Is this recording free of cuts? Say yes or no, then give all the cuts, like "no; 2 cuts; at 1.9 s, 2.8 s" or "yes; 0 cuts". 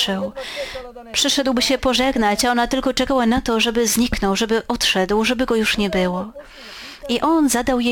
yes; 0 cuts